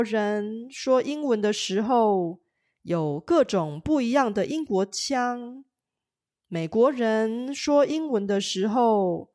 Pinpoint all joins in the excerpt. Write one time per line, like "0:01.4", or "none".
none